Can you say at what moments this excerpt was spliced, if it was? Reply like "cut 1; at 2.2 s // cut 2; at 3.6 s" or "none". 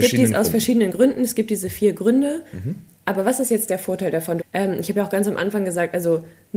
cut 1; at 4.4 s